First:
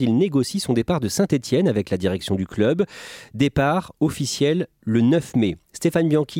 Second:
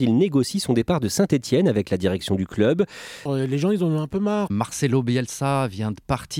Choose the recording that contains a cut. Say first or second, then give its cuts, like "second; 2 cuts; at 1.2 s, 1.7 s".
second; 2 cuts; at 3.3 s, 4.5 s